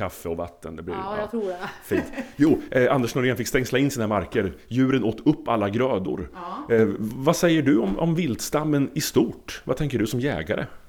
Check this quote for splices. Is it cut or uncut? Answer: uncut